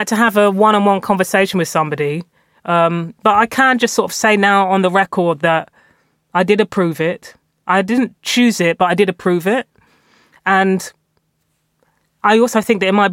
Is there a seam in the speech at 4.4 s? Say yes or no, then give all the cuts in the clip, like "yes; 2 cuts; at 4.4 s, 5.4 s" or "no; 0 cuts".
no; 0 cuts